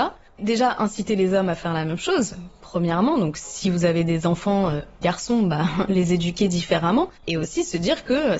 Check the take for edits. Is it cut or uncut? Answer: cut